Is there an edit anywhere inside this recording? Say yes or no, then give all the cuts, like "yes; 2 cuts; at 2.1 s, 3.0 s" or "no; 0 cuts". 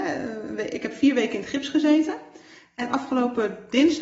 no; 0 cuts